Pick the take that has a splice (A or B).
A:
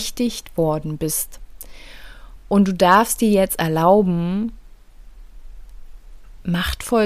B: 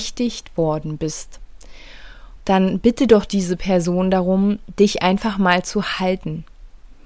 B